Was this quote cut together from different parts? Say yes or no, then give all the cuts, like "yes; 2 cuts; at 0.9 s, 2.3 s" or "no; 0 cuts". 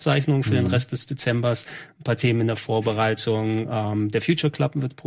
no; 0 cuts